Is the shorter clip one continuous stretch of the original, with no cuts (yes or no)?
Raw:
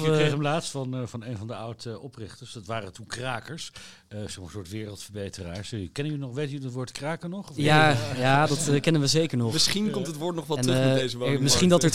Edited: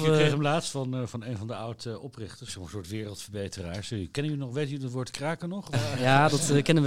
no